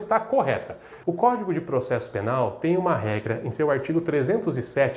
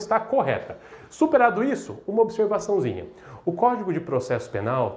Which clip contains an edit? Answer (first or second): first